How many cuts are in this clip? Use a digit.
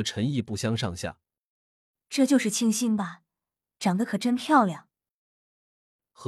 1